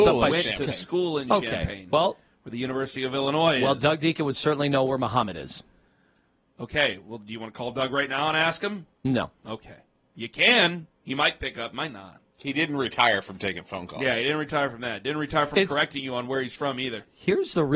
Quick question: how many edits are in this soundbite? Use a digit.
0